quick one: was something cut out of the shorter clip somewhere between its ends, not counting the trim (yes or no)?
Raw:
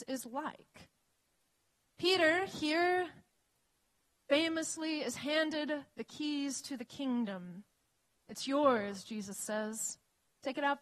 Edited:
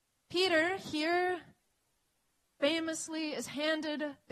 no